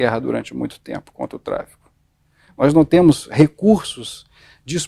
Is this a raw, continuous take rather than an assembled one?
yes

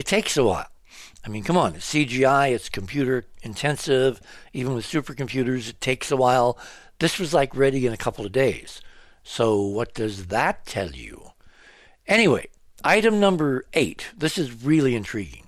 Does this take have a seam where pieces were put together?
no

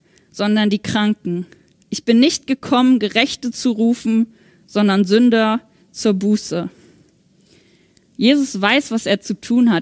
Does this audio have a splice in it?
no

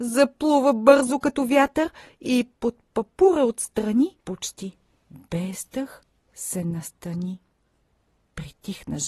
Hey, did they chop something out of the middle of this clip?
yes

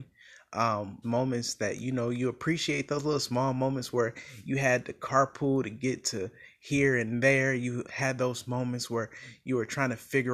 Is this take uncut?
no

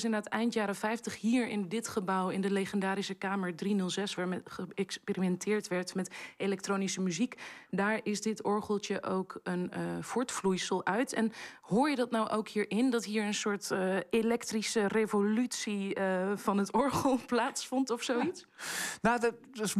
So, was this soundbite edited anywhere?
yes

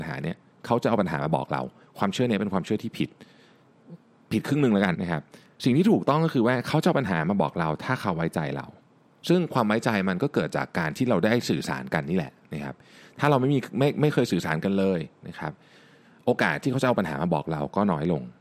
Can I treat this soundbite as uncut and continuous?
no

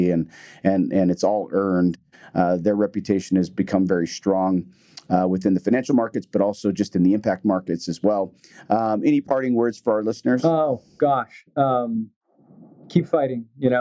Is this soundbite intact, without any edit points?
yes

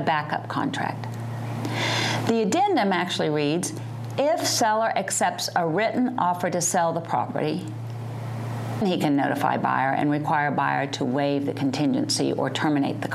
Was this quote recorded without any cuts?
no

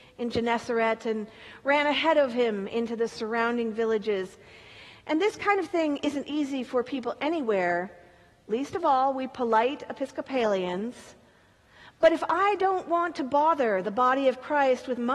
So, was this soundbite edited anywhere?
no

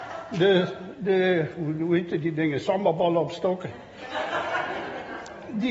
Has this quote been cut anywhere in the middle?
no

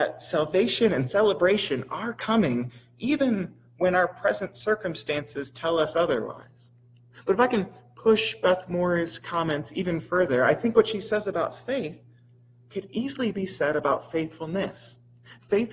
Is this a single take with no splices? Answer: yes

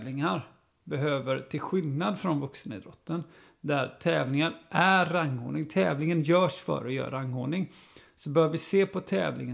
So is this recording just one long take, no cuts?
yes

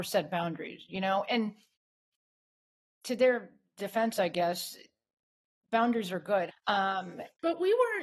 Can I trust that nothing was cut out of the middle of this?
no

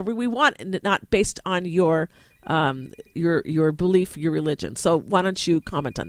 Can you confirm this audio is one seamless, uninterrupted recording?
no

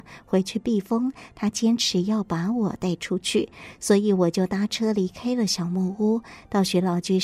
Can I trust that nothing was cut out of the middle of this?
yes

